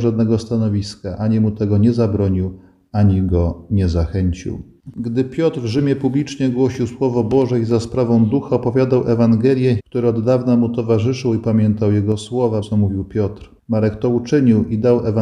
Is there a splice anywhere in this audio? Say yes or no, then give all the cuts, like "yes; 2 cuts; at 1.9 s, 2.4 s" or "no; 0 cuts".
yes; 3 cuts; at 4.9 s, 9.8 s, 12.6 s